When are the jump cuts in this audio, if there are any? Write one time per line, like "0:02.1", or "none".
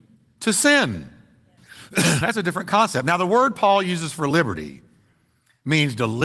0:01.6